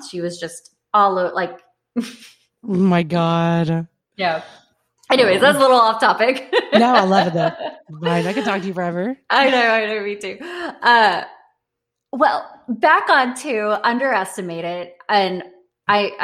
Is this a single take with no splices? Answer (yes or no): yes